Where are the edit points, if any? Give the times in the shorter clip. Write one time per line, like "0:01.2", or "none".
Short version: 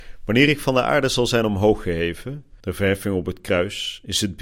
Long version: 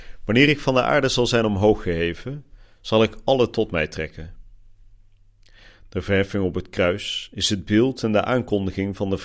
0:02.6

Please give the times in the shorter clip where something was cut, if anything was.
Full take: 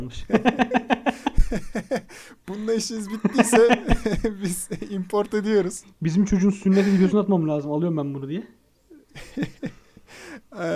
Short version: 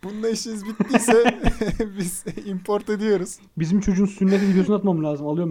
none

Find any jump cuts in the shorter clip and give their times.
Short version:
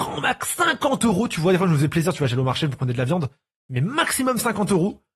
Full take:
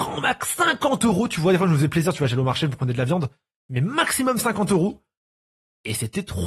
none

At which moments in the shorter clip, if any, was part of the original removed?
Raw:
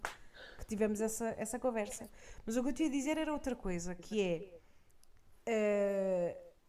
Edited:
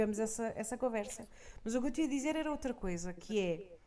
none

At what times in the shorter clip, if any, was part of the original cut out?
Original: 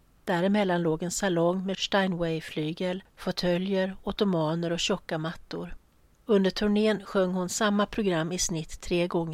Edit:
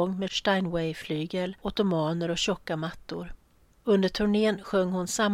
0:01.6

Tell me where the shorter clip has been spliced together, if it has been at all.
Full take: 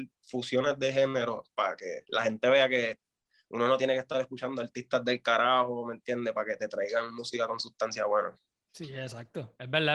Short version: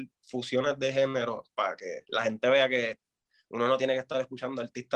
none

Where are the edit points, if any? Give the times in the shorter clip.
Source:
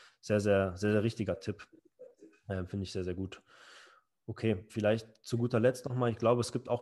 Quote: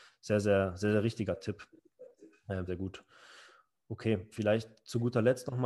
0:02.7

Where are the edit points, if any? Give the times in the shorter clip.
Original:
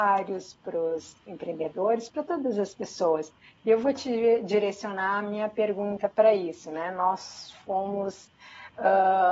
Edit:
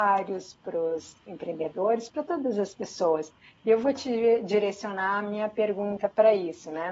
none

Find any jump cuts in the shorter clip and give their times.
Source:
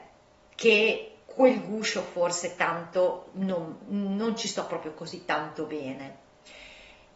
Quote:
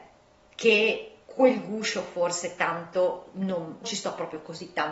0:03.8

